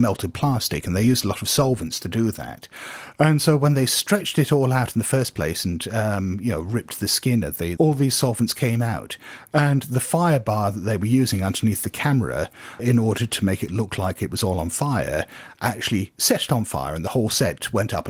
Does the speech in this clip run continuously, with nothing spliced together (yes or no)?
no